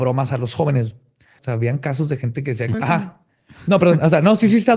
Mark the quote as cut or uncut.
cut